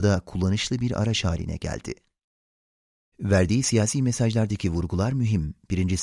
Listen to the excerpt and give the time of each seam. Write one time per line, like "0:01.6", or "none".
0:03.1